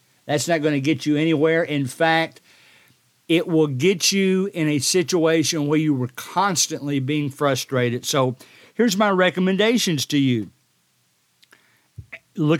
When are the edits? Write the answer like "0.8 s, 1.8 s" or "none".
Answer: none